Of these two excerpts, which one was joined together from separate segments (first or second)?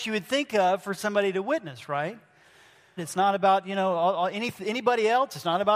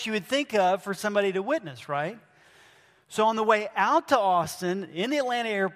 first